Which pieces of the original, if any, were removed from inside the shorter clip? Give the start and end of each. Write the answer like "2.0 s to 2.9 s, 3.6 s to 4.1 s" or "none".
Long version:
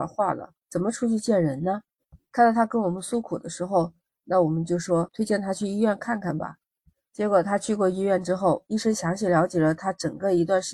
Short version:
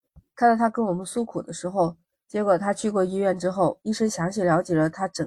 4.1 s to 7.0 s

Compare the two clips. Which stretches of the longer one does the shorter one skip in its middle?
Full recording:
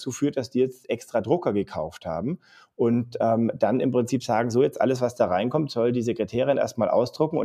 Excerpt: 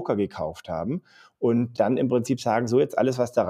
3.1 s to 3.6 s

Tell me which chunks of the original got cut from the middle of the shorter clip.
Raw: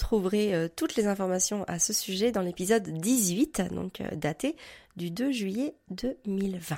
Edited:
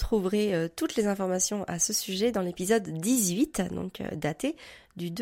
none

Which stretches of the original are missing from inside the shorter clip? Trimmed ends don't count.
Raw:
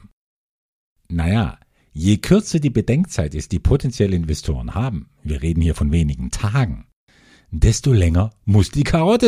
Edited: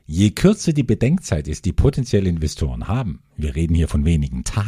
none

